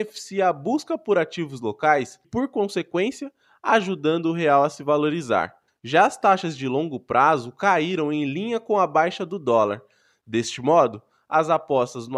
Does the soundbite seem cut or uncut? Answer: cut